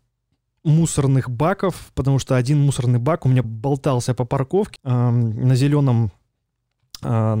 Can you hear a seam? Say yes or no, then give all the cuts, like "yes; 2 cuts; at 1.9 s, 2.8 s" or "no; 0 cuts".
yes; 2 cuts; at 3.4 s, 4.8 s